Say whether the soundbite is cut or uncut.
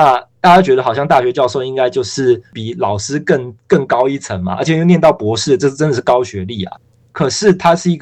uncut